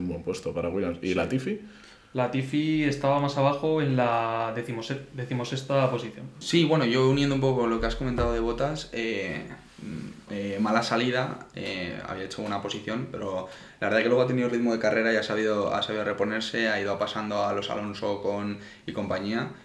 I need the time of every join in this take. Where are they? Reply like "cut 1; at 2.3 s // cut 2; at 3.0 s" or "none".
cut 1; at 6.4 s // cut 2; at 10.3 s